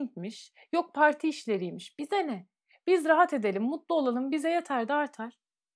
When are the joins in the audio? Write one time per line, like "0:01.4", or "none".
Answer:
none